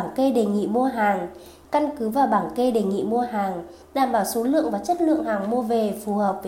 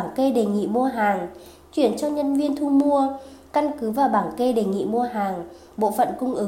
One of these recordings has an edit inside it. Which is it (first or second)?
first